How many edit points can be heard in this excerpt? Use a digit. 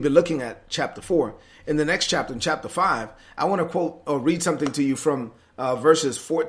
0